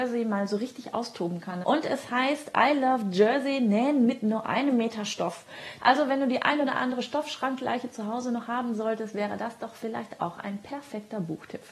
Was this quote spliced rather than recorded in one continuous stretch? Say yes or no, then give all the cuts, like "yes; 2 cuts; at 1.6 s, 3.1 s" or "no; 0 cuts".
yes; 2 cuts; at 1.6 s, 5.8 s